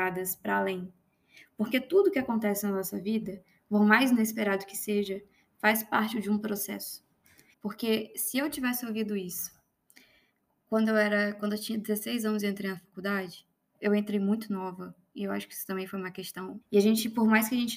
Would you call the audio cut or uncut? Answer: cut